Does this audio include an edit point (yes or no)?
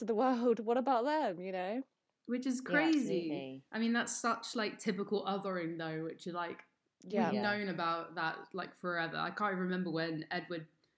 no